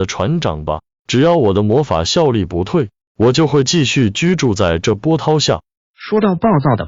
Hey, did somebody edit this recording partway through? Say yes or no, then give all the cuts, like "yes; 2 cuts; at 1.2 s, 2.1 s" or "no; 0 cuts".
no; 0 cuts